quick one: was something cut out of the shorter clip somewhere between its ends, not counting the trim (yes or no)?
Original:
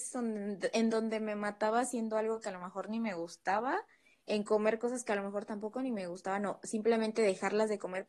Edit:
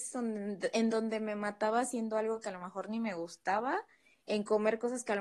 no